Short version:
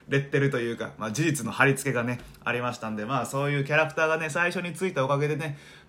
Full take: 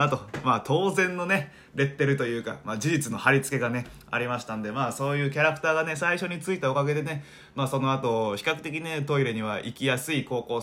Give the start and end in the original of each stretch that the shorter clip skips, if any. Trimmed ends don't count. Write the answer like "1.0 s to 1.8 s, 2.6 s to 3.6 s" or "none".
none